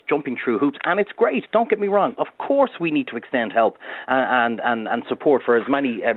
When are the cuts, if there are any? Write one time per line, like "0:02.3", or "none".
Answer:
none